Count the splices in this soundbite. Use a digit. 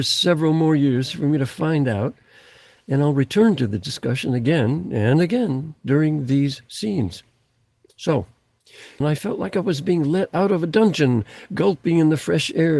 1